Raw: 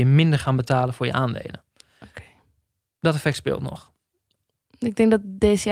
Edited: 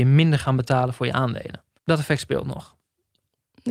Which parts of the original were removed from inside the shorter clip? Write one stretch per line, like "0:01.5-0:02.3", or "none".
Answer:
0:01.8-0:02.9